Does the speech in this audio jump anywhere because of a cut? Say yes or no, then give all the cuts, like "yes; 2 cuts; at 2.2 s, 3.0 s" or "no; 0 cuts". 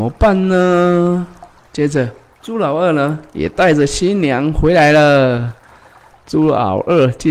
yes; 1 cut; at 6.1 s